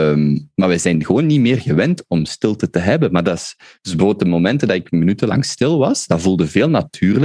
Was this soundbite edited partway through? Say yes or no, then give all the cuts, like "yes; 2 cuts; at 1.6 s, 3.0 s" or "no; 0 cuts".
no; 0 cuts